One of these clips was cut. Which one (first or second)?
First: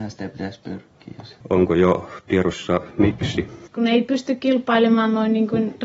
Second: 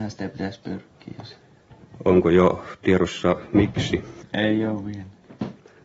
first